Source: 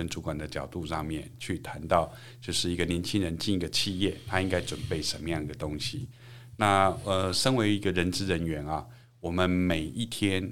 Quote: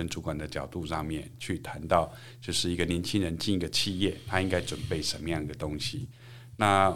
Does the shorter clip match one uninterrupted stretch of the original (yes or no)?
yes